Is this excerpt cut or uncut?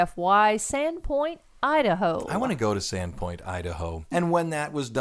cut